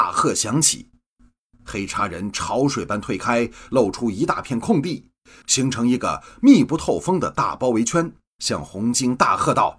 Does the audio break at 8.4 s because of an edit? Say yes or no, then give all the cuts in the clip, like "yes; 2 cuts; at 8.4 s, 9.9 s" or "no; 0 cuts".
yes; 1 cut; at 8.4 s